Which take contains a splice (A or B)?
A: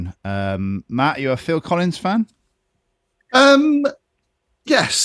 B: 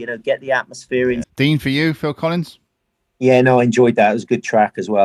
B